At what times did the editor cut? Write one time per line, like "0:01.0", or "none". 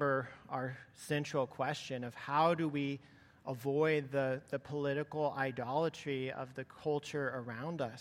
none